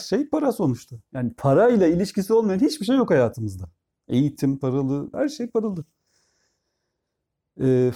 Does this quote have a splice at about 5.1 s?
yes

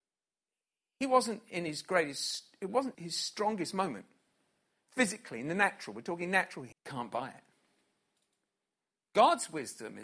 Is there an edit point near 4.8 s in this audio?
no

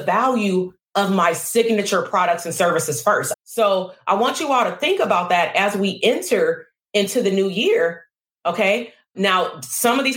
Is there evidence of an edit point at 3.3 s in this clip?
yes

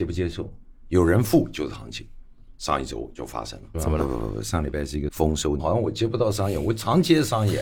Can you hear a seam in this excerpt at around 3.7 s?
yes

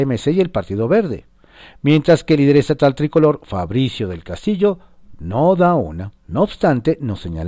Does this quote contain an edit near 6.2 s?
yes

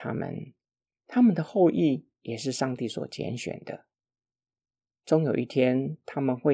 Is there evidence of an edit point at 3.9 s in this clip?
no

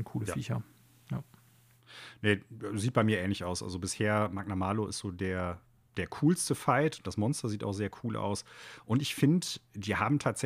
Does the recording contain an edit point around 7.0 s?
no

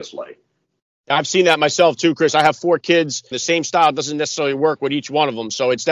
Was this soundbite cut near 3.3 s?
yes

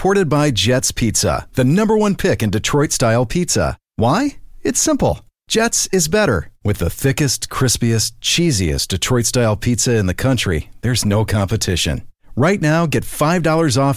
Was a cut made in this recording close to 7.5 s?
no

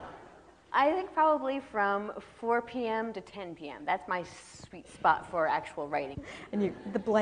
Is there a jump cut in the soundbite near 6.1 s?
yes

